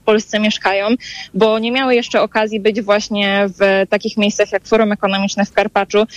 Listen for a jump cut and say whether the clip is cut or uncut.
uncut